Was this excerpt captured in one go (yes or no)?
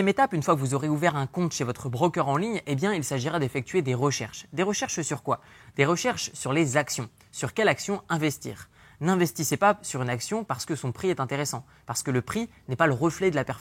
yes